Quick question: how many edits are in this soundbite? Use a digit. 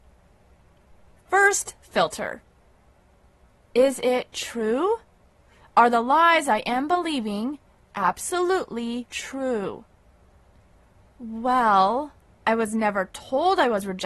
1